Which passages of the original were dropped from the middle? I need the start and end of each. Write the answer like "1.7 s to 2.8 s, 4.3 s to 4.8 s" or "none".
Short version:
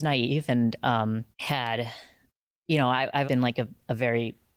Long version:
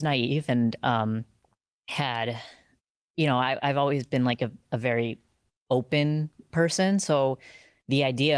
1.3 s to 1.8 s, 3.7 s to 4.1 s

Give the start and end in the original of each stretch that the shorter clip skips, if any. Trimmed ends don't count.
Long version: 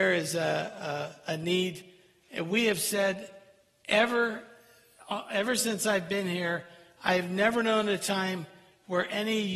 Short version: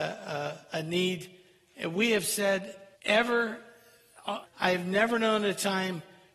3.5 s to 3.8 s, 5.3 s to 6.9 s

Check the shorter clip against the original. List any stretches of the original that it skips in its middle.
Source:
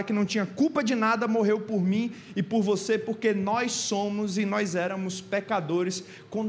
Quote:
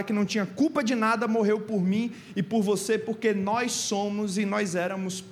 none

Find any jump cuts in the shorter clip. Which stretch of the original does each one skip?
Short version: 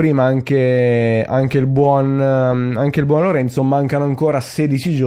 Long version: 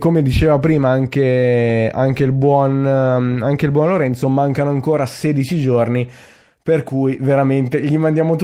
none

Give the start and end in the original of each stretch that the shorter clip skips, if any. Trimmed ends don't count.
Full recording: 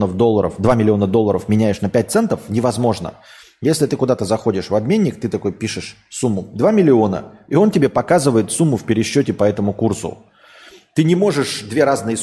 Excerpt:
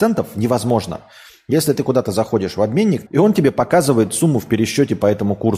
5.2 s to 7.4 s

